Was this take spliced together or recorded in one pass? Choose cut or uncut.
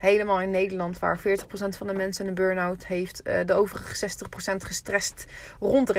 uncut